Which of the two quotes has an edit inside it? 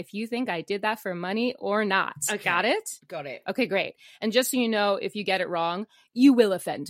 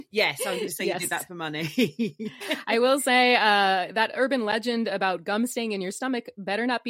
second; 1 cut; at 2.4 s

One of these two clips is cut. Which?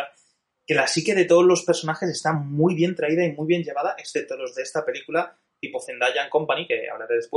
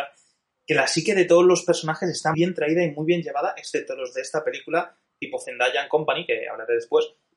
second; 1 cut; at 2.3 s

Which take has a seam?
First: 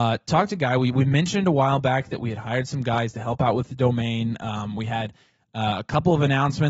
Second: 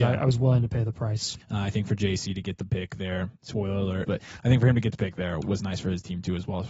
second; 3 cuts; at 1.4 s, 4.1 s, 5.4 s

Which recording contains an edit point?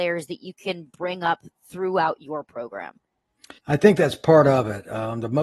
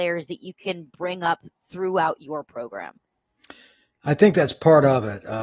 first; 1 cut; at 3.6 s

